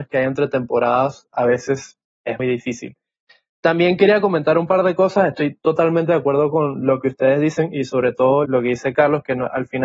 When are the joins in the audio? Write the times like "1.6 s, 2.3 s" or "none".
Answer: 2.4 s, 8.4 s

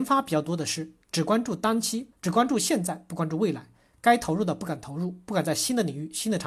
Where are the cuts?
2.1 s

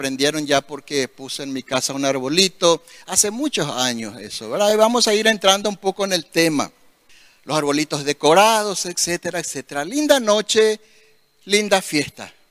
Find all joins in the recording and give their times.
none

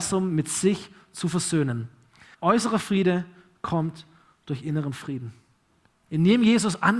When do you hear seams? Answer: 2.3 s, 5.9 s

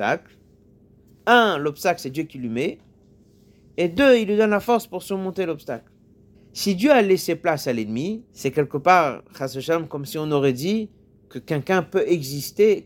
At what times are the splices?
6.3 s, 8.3 s

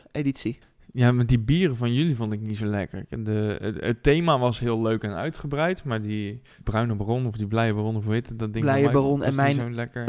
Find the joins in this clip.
none

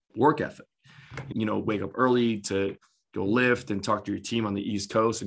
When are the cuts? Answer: 1.3 s

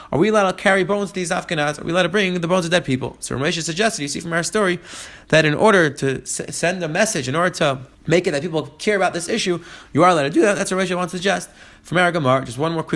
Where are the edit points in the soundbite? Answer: 7.9 s

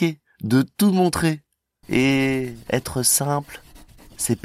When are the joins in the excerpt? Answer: 1.8 s

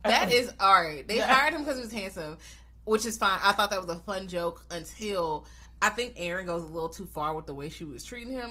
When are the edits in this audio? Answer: none

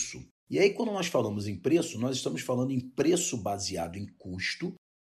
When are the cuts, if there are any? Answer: none

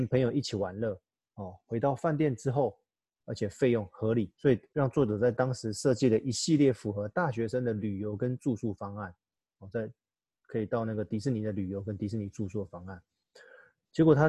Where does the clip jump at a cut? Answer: 3.2 s, 4.3 s

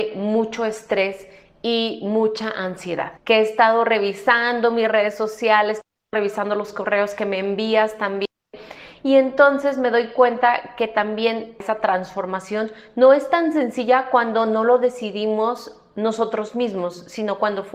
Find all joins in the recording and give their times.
3.2 s

